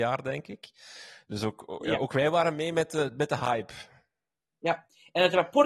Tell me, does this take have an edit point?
no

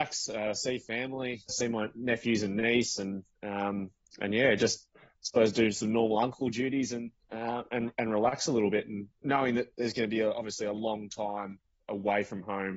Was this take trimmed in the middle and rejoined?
yes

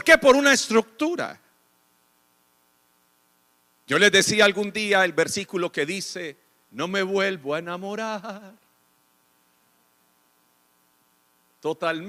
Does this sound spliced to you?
no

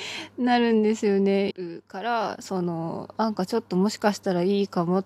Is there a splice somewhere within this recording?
yes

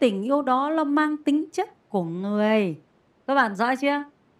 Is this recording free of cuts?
no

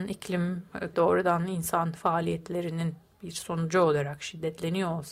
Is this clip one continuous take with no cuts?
no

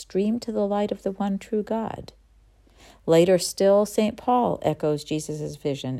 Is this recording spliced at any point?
no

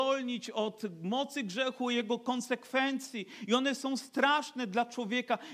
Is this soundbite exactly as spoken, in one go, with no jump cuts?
yes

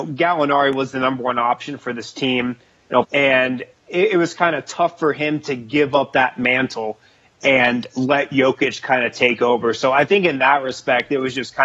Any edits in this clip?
yes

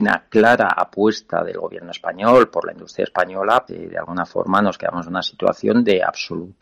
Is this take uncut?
no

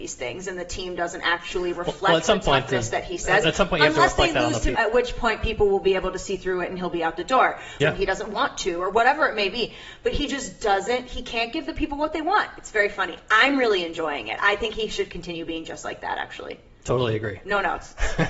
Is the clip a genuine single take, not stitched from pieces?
no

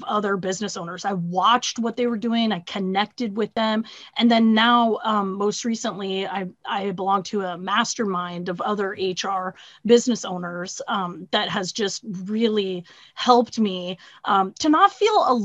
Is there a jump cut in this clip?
no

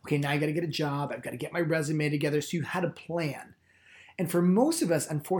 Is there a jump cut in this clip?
no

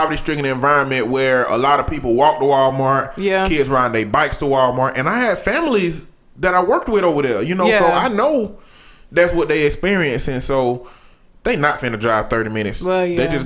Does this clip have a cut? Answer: no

